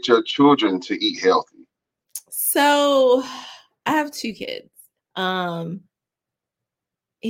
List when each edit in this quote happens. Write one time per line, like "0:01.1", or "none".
0:05.0

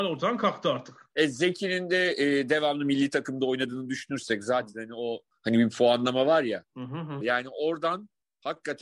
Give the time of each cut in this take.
0:07.2

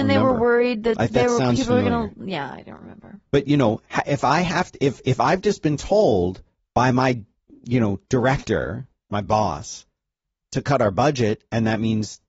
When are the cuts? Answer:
none

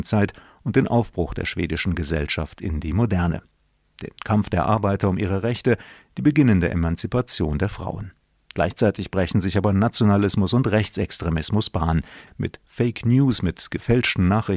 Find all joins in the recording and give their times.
0:12.3

